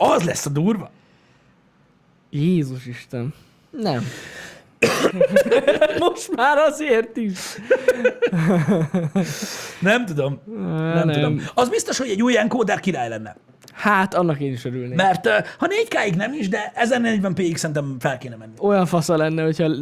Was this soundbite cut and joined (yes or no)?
yes